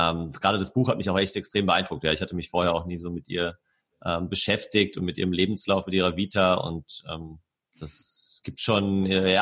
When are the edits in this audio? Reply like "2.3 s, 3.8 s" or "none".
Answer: none